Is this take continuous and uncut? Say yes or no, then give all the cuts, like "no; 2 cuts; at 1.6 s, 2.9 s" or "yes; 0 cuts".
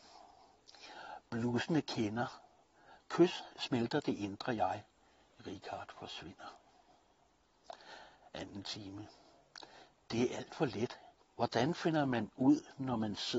no; 2 cuts; at 3.5 s, 11.2 s